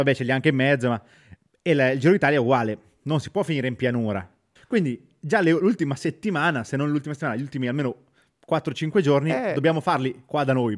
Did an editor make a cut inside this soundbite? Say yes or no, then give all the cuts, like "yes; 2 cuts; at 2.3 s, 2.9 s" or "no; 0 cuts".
yes; 1 cut; at 4.6 s